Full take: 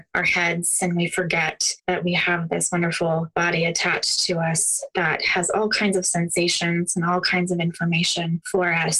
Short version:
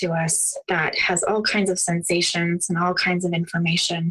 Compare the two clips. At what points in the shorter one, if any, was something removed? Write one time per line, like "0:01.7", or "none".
none